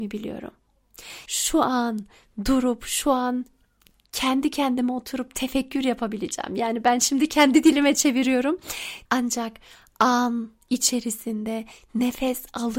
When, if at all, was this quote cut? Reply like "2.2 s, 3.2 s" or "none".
1.3 s, 9.1 s